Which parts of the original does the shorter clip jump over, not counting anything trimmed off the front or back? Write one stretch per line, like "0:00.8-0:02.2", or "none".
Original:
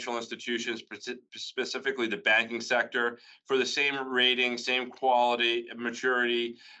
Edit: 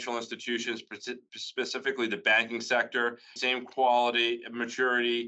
0:03.4-0:04.6